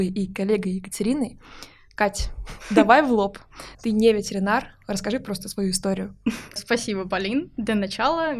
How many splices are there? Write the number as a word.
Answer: two